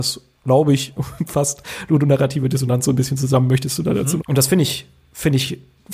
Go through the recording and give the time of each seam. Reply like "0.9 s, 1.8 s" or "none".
4.2 s